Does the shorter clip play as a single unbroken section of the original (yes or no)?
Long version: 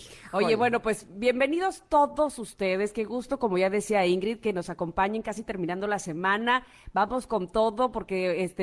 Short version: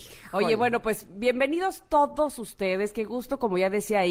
yes